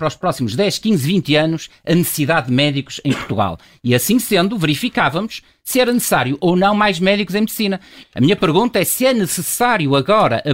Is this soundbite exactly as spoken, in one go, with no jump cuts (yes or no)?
no